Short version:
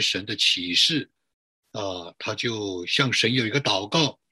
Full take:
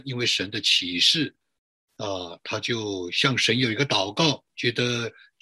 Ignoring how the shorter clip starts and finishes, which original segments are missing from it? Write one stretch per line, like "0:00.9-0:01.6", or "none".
none